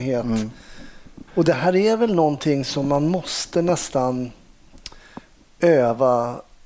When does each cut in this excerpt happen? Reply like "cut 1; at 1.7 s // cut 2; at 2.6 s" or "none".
cut 1; at 1.3 s